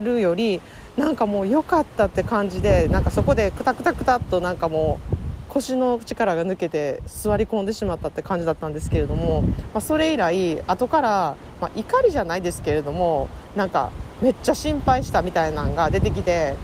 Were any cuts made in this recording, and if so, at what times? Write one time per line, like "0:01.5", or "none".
none